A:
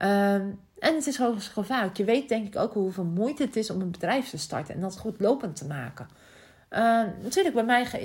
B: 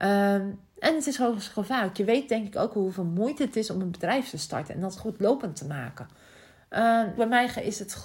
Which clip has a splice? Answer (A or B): B